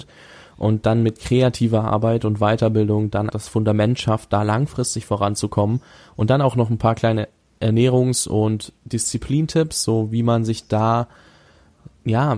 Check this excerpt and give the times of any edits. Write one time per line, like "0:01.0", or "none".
0:03.3